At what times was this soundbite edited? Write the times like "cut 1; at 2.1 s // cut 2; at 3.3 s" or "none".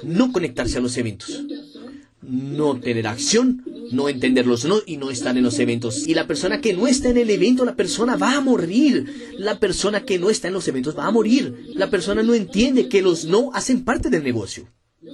cut 1; at 6.1 s // cut 2; at 11.7 s